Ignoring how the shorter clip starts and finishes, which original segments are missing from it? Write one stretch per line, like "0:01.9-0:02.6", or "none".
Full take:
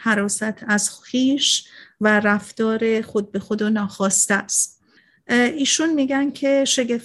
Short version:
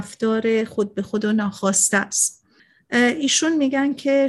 none